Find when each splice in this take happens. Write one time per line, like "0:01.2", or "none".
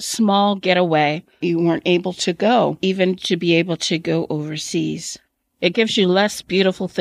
0:01.4

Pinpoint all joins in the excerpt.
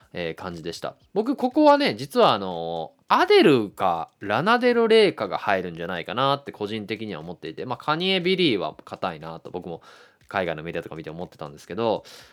0:03.0

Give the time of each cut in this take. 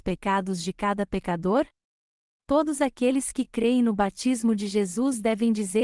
0:02.3

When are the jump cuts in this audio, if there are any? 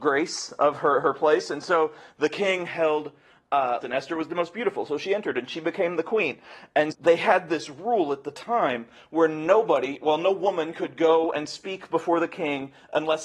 0:03.8
0:06.9

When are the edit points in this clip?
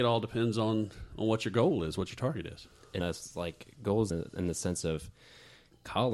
0:03.0
0:04.1

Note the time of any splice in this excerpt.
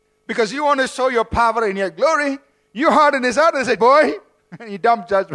0:03.8

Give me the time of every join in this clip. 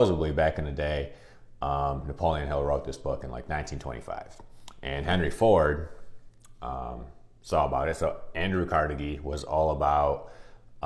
none

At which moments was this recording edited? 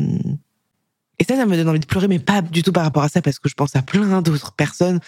none

